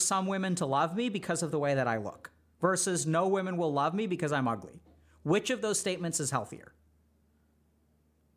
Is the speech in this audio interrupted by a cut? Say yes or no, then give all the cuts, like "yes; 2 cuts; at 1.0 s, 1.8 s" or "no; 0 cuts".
no; 0 cuts